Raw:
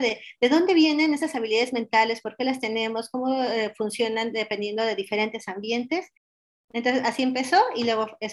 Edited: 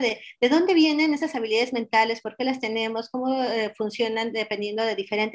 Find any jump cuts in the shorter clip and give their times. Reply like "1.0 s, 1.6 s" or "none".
none